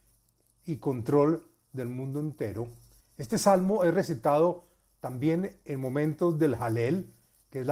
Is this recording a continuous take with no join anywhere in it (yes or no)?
no